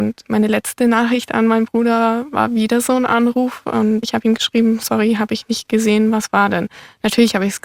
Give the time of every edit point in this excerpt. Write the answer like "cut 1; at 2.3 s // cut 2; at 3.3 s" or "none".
none